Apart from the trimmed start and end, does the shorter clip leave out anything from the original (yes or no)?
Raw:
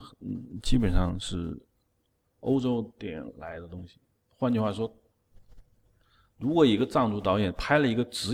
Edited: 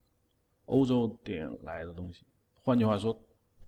no